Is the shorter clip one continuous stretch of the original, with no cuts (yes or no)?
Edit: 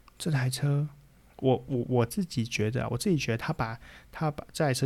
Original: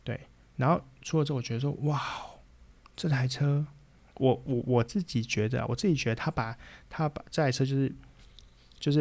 yes